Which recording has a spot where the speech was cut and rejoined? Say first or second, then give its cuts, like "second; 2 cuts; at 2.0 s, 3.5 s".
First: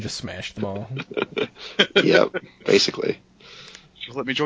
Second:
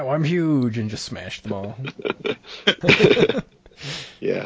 second; 1 cut; at 2.8 s